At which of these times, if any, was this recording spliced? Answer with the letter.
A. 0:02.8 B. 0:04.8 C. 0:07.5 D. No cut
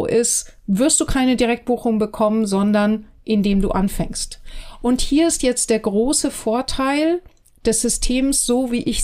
D